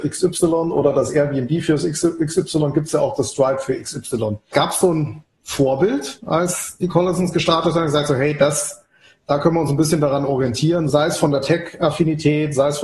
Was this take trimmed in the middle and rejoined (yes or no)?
yes